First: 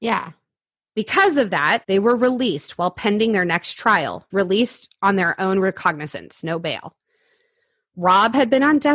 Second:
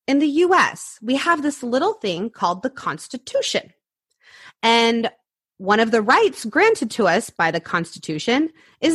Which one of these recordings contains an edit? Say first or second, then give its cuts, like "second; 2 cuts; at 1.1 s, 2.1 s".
first; 2 cuts; at 1.8 s, 4.3 s